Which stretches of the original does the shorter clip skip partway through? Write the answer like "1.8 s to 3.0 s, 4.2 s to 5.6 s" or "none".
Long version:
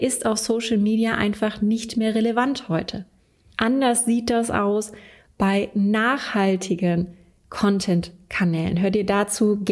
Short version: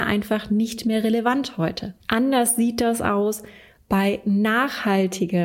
3.1 s to 3.5 s